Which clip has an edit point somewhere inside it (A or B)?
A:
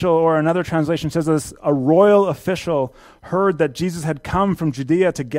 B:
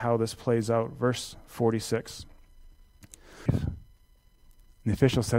B